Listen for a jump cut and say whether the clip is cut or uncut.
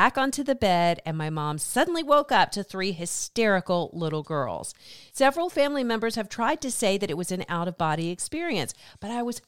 uncut